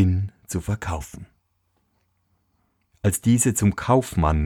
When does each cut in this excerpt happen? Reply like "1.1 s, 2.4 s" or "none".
2.9 s